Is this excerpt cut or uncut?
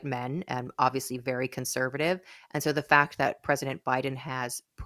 uncut